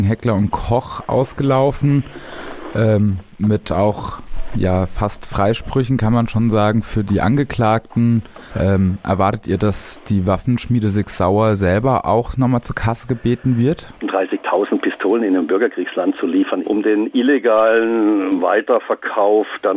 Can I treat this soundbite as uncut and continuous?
no; 3 cuts; at 8.5 s, 14.0 s, 16.6 s

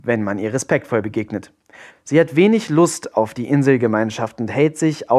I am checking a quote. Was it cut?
yes; 1 cut; at 1.9 s

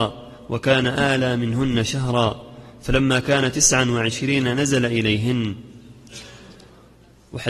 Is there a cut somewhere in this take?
no; 0 cuts

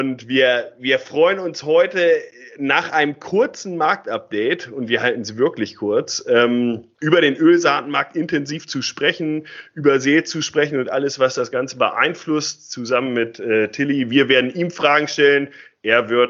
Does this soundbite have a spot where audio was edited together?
no; 0 cuts

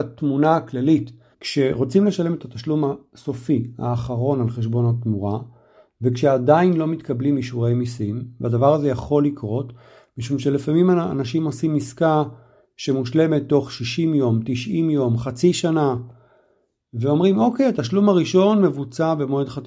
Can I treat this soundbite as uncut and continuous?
no; 1 cut; at 1.3 s

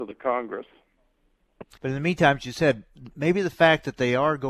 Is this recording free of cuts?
no; 1 cut; at 1.8 s

